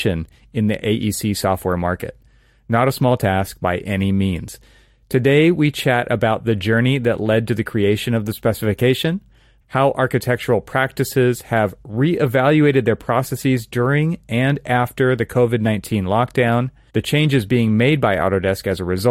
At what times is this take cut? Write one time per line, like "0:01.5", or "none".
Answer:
0:09.6
0:16.9